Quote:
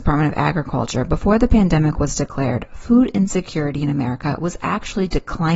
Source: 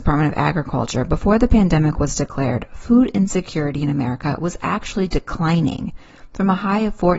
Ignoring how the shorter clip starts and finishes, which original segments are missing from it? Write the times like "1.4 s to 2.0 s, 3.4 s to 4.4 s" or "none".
none